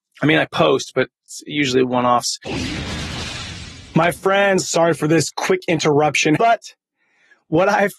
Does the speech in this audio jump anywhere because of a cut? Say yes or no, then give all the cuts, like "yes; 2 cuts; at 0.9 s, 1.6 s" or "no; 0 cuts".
yes; 1 cut; at 6.4 s